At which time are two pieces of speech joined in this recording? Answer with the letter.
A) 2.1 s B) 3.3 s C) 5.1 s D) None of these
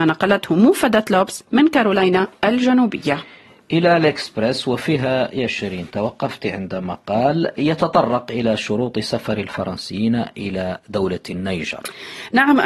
D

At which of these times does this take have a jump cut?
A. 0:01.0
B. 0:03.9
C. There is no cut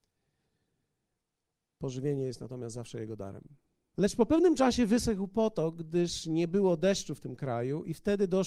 B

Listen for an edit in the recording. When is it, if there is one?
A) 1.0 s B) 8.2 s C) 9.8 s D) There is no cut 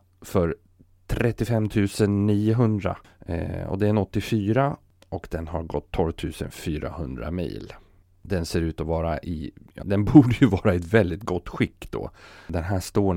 C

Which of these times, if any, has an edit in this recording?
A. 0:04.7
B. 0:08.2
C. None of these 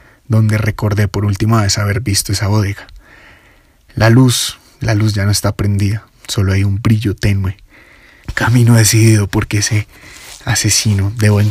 B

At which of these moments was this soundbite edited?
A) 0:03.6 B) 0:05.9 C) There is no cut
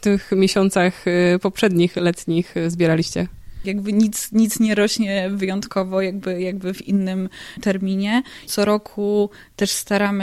A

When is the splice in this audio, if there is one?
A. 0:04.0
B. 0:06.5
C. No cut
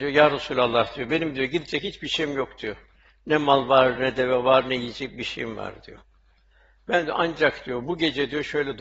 A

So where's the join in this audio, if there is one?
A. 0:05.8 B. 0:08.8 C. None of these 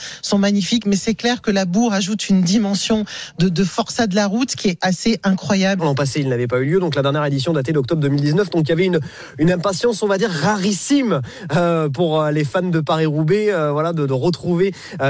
A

